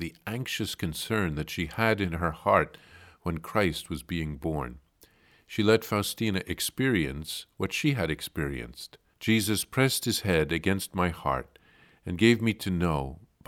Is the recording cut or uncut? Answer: cut